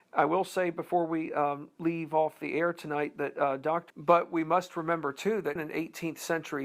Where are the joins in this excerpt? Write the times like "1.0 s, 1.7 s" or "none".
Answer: 3.9 s, 5.6 s